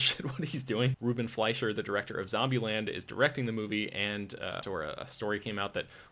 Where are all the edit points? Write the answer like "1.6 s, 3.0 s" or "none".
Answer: 0.9 s, 4.6 s